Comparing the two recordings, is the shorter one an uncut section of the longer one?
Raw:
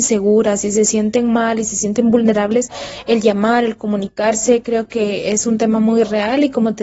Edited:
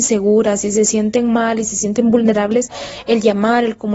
yes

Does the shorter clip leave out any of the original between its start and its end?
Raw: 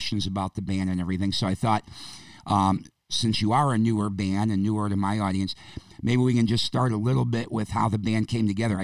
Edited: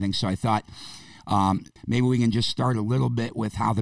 yes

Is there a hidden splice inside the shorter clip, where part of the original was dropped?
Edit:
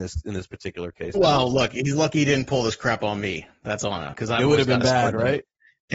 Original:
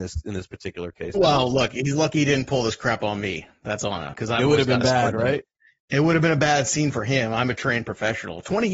no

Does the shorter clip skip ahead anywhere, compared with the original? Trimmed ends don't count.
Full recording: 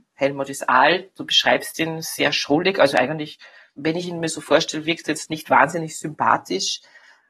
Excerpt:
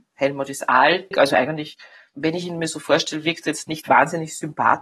yes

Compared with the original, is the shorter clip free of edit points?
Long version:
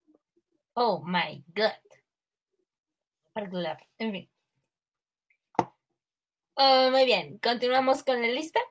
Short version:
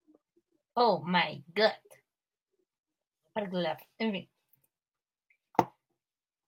yes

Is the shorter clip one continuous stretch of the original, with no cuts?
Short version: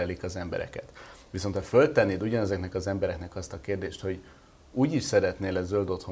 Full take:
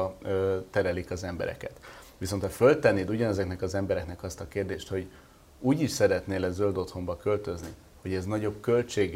yes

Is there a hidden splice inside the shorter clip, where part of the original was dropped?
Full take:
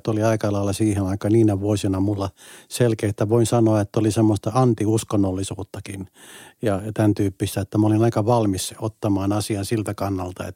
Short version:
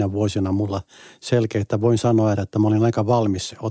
yes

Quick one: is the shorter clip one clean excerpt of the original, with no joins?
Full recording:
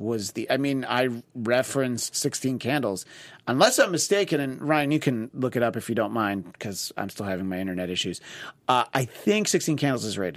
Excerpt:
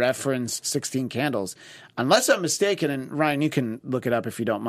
yes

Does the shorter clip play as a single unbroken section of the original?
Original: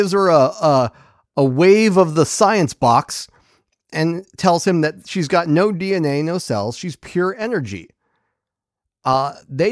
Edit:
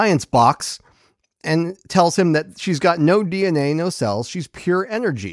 yes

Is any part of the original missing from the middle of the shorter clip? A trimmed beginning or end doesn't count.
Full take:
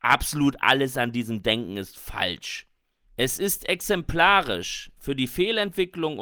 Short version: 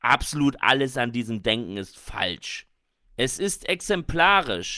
no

